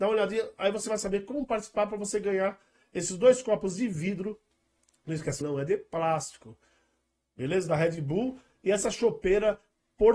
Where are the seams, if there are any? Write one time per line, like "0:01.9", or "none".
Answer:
0:05.4